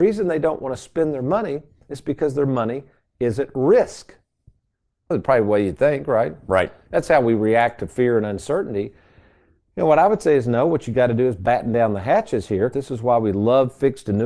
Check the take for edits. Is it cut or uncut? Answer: cut